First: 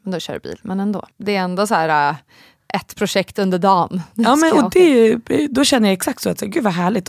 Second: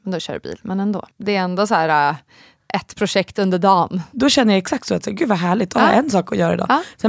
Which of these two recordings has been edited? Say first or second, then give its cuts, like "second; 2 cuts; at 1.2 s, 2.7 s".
second; 1 cut; at 4.1 s